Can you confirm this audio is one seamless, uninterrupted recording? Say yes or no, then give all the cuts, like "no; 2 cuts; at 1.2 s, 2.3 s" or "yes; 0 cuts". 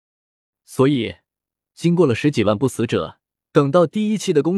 no; 1 cut; at 3.5 s